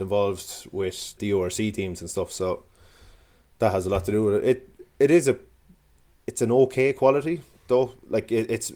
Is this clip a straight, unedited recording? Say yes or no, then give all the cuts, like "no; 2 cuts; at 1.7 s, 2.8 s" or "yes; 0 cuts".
no; 1 cut; at 1.2 s